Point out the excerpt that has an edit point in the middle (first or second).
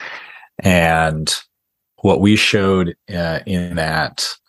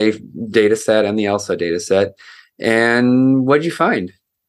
first